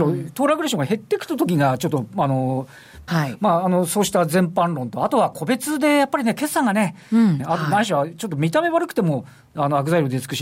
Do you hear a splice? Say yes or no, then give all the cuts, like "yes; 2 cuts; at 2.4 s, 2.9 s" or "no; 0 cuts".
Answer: yes; 2 cuts; at 3.1 s, 7.4 s